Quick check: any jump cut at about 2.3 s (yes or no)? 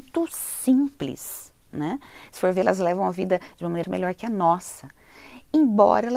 no